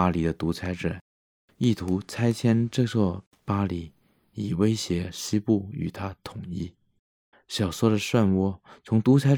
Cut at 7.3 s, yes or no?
yes